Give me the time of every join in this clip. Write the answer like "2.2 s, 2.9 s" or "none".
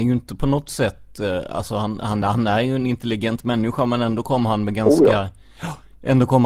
none